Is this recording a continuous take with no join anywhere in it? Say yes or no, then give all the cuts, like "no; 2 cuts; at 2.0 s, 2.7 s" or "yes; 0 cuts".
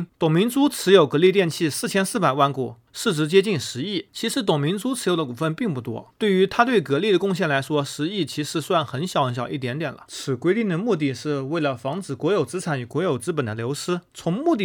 no; 1 cut; at 10.1 s